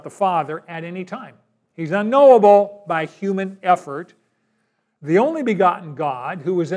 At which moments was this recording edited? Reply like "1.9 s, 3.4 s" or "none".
none